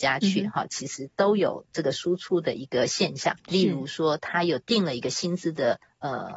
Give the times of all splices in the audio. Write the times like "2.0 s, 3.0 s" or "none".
3.4 s